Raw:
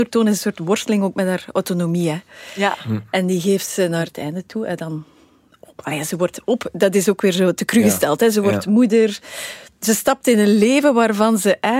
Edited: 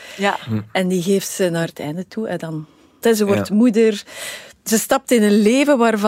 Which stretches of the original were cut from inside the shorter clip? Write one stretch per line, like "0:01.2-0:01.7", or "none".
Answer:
0:05.4-0:08.2